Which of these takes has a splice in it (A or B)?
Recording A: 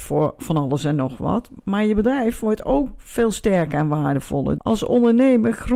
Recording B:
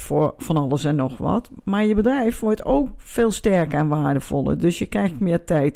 A